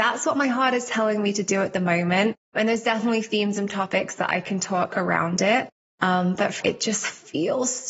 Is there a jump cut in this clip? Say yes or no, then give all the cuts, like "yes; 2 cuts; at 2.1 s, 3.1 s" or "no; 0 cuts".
yes; 2 cuts; at 2.4 s, 6.6 s